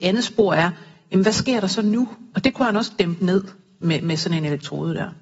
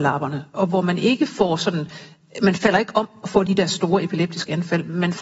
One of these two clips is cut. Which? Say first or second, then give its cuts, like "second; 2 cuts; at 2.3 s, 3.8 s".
first; 1 cut; at 2.3 s